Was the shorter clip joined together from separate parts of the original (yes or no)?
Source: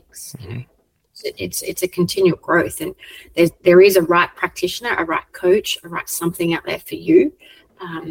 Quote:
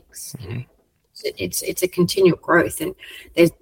no